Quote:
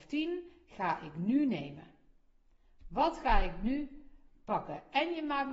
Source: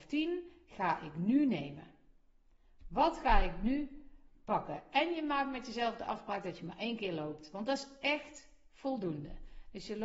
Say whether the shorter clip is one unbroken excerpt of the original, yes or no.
yes